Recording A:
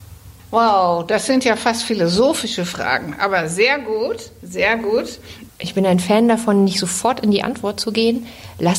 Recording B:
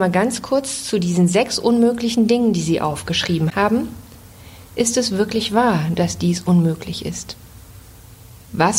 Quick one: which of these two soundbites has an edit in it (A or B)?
A